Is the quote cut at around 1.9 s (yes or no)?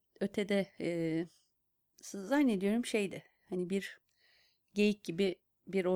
yes